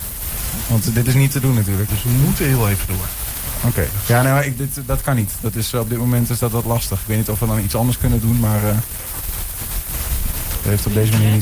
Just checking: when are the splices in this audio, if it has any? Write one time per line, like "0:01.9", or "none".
0:01.9